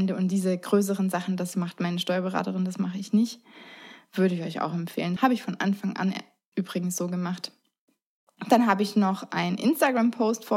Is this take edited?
yes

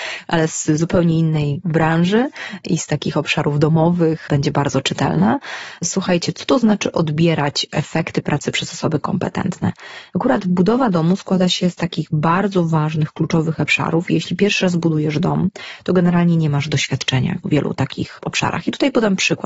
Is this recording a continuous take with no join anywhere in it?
yes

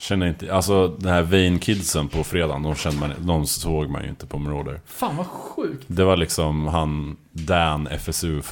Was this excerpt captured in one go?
yes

